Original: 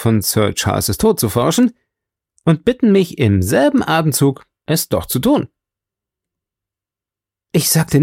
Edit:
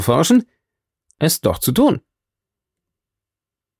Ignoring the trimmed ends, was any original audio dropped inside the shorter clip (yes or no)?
yes